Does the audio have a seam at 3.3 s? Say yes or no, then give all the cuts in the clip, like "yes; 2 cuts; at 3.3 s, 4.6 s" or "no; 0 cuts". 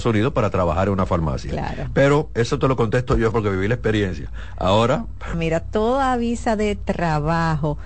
yes; 2 cuts; at 3.3 s, 5.3 s